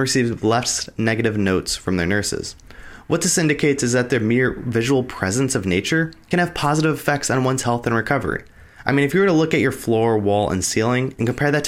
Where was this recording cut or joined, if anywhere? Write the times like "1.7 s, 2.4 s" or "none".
8.8 s